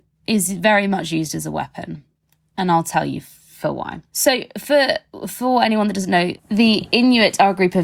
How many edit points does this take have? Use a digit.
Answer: 2